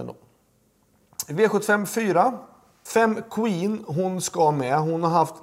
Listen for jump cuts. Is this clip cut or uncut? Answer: cut